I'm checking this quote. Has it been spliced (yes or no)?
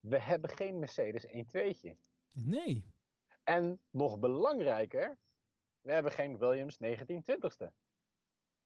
no